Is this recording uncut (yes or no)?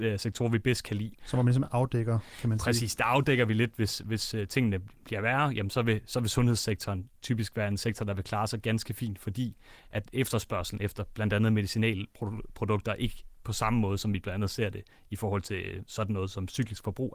yes